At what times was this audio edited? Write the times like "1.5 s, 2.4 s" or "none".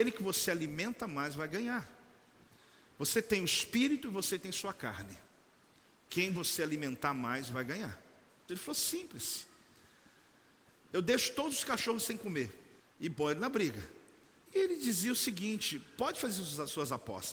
8.5 s, 12.8 s, 14.5 s